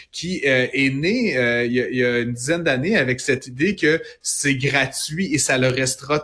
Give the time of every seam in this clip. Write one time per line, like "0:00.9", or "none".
none